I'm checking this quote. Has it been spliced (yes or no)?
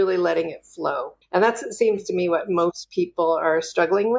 yes